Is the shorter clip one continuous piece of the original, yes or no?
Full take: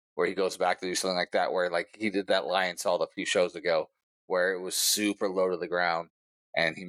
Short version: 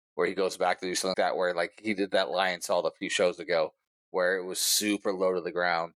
no